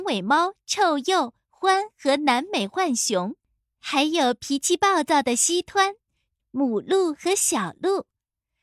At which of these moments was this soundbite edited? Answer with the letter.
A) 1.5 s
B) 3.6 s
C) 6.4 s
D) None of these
C